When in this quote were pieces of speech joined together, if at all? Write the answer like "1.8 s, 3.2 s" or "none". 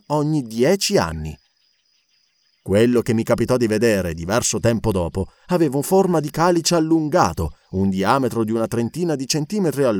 none